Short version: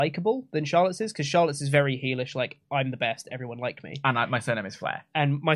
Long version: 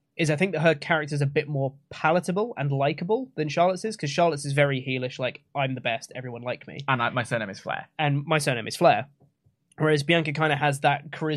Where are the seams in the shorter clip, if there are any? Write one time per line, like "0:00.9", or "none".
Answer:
none